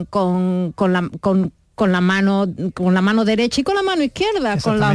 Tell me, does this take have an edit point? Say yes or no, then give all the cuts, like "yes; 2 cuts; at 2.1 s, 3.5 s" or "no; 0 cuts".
no; 0 cuts